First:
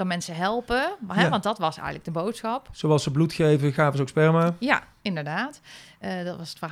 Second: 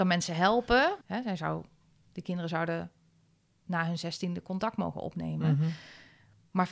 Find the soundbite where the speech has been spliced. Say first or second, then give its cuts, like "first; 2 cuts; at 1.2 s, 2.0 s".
second; 1 cut; at 1.0 s